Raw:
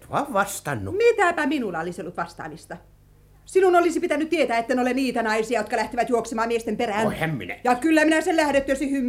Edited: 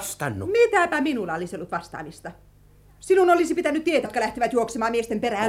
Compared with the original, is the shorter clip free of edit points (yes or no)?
no